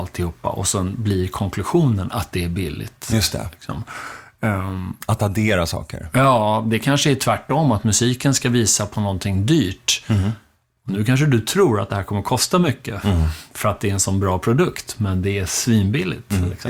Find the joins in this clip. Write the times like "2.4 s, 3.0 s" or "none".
none